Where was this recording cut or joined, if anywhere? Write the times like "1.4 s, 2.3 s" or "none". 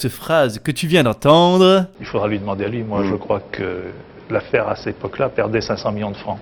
none